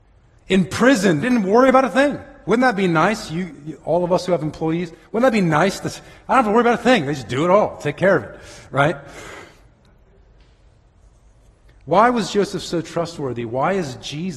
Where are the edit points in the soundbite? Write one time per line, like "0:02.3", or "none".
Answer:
0:01.2
0:09.7